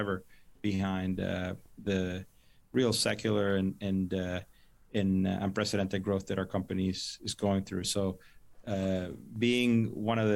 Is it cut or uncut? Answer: cut